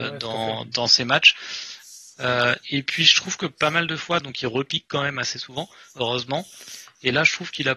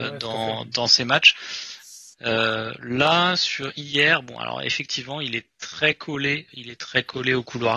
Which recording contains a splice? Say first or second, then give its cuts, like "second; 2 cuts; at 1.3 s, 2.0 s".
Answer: second; 2 cuts; at 2.1 s, 6.5 s